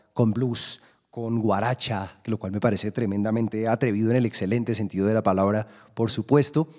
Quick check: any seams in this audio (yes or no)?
no